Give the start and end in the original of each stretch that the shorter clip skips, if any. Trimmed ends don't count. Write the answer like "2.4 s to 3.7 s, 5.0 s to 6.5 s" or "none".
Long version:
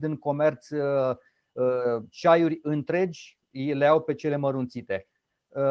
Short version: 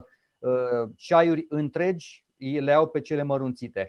none